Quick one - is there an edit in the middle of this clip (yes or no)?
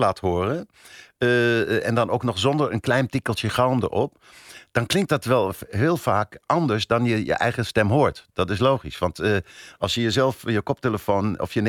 no